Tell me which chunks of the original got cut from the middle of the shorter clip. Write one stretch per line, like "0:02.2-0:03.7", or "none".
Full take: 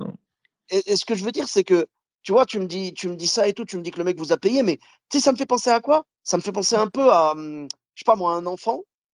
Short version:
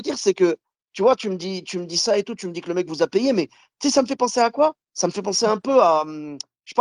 none